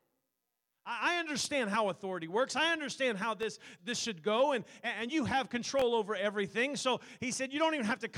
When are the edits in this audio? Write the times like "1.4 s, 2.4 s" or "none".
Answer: 3.8 s